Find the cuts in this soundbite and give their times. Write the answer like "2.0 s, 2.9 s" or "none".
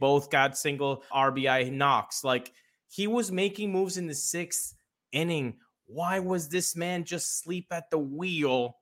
1.1 s